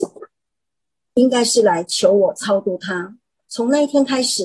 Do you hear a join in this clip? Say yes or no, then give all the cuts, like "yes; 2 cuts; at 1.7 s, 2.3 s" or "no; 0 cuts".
yes; 1 cut; at 1.1 s